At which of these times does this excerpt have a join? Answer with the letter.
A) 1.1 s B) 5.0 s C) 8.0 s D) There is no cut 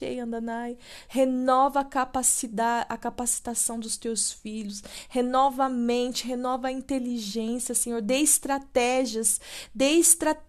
A